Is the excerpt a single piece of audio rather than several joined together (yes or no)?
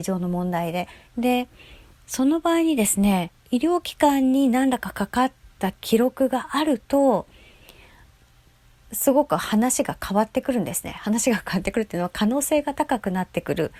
no